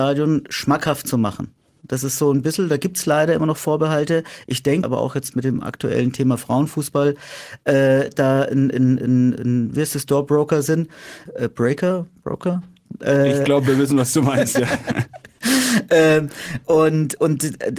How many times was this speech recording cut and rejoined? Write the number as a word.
one